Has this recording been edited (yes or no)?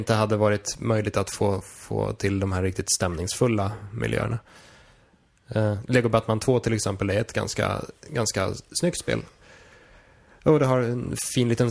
no